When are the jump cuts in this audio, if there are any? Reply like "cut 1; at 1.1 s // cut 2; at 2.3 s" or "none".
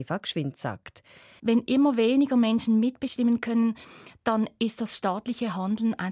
cut 1; at 1.4 s